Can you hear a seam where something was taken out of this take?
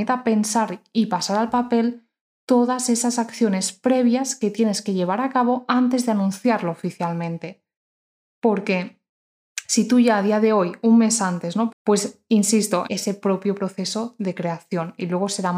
yes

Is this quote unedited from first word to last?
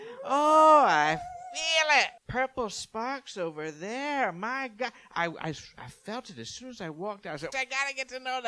no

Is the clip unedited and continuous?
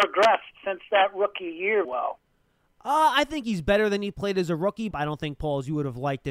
no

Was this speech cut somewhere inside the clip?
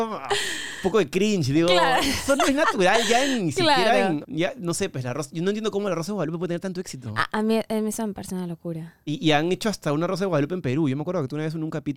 yes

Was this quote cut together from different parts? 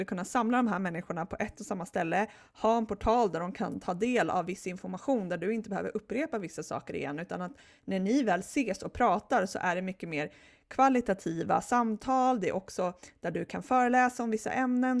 no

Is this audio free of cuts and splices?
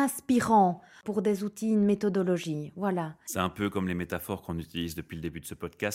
yes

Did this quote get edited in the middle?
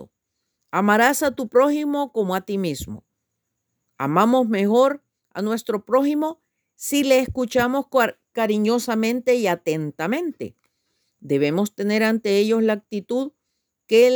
no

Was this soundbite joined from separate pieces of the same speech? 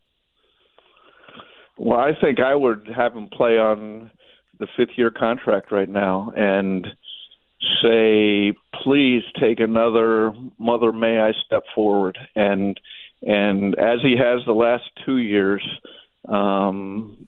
no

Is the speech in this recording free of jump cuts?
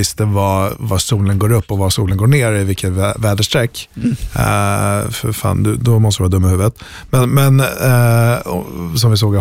yes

